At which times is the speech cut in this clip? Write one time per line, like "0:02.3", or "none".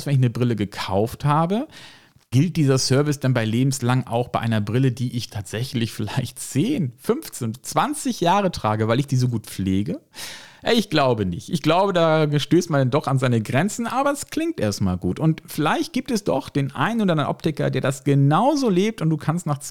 none